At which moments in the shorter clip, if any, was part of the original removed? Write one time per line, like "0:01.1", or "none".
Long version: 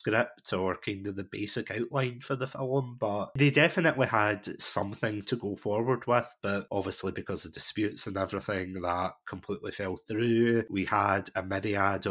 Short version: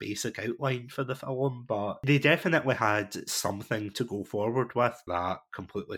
0:05.1